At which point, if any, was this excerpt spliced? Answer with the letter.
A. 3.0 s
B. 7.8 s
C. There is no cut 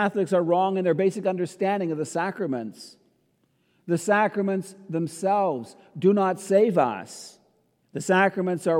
B